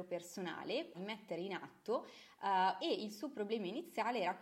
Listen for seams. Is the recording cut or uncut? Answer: cut